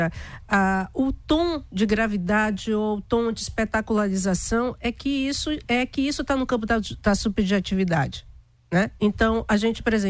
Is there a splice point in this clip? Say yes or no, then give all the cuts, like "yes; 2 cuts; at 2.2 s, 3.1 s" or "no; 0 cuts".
yes; 1 cut; at 9.0 s